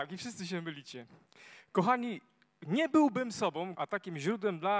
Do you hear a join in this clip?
yes; 1 cut; at 3.7 s

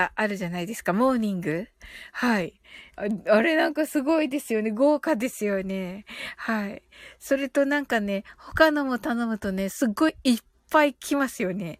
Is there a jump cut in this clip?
no; 0 cuts

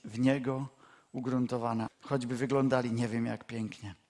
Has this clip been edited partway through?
yes; 1 cut; at 1.9 s

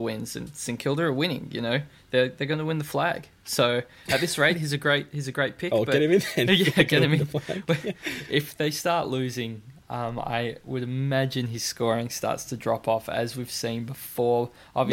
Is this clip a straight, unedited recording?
yes; 0 cuts

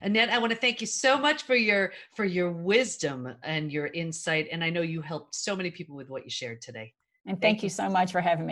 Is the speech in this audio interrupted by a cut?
no; 0 cuts

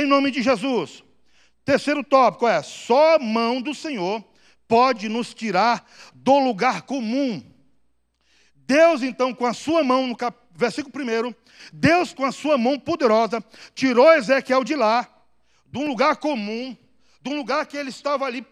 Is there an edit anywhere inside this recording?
no; 0 cuts

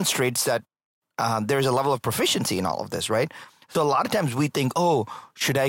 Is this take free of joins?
yes; 0 cuts

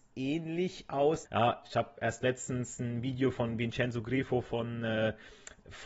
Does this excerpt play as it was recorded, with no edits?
no; 1 cut; at 1.2 s

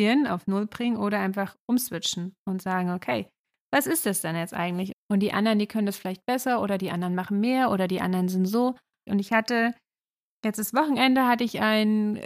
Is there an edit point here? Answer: yes; 2 cuts; at 4.9 s, 9.1 s

